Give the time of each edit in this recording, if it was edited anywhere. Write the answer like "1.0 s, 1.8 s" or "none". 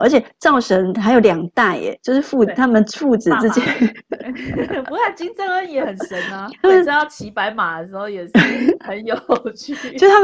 3.7 s, 6.6 s